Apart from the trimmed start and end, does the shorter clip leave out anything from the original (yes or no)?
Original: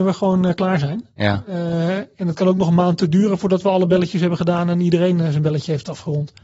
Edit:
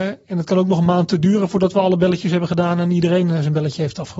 no